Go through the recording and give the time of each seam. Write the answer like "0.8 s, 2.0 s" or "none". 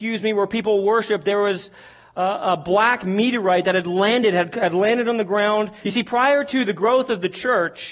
5.8 s